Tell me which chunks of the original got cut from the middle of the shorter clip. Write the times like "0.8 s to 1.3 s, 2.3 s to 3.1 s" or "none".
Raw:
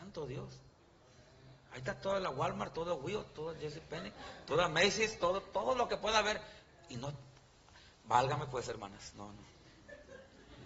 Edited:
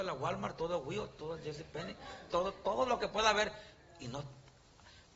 4.5 s to 5.2 s